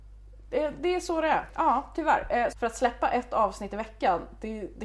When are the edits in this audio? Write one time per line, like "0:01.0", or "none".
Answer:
0:01.5
0:02.5